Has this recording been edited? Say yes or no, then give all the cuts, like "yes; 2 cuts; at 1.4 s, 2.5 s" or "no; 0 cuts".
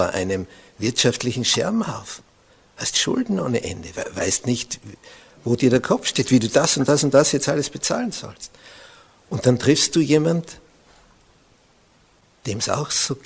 no; 0 cuts